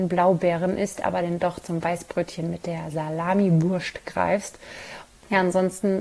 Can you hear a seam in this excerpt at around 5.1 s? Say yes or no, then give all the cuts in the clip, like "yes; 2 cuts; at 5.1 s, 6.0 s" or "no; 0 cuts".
yes; 1 cut; at 5.1 s